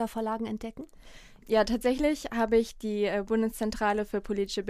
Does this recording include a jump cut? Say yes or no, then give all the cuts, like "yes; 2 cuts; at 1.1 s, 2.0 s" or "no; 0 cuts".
no; 0 cuts